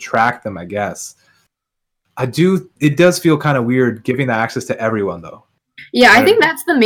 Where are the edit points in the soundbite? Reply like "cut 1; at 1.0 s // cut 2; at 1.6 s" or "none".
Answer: none